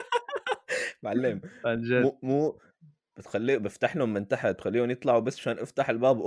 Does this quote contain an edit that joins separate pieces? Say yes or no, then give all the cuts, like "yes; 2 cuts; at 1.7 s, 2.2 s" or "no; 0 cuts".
no; 0 cuts